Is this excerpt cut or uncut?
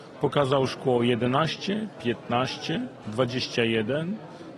uncut